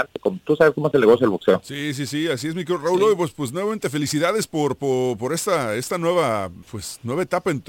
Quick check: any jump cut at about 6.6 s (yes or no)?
yes